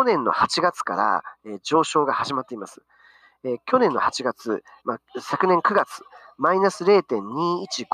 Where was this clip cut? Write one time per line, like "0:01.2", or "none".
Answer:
0:04.8